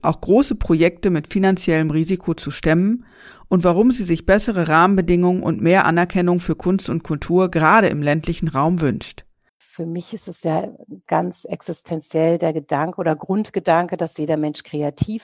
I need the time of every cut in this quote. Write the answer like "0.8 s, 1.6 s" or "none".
9.5 s